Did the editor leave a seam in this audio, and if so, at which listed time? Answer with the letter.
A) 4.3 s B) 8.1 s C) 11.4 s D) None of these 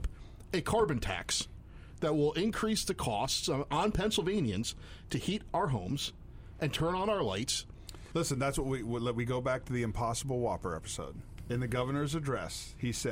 B